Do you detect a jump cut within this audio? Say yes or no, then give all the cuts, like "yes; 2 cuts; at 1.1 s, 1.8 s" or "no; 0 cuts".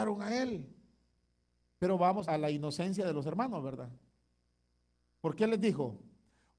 yes; 1 cut; at 2.2 s